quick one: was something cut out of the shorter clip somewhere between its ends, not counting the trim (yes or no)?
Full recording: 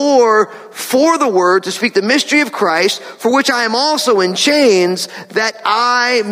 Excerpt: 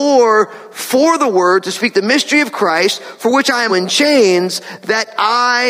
yes